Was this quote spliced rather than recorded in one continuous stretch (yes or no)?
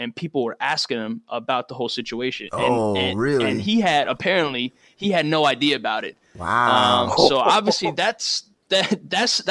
no